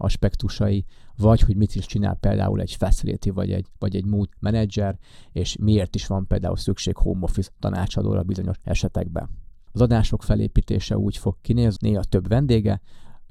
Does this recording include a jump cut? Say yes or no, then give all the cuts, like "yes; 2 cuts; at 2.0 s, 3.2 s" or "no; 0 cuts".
yes; 2 cuts; at 9.7 s, 11.8 s